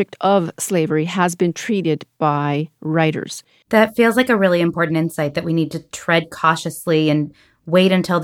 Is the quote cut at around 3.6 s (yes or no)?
yes